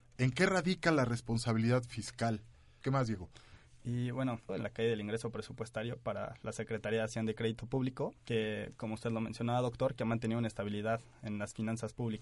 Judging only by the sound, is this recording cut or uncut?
cut